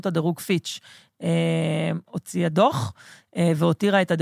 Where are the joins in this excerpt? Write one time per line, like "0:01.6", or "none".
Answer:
0:02.1

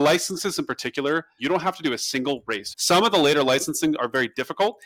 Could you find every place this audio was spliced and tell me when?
0:01.4
0:02.7

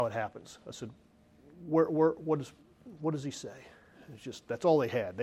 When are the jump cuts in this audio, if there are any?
none

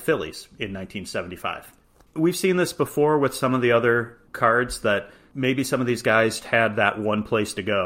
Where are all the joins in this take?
0:02.0
0:06.4

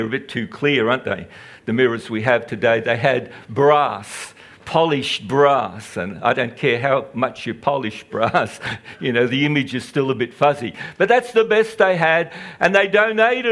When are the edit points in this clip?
none

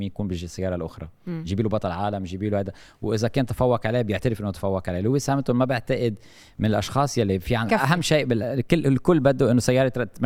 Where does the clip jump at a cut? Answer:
0:07.7

